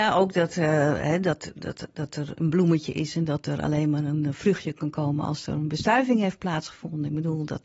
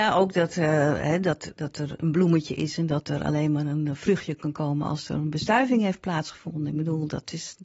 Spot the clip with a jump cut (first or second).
second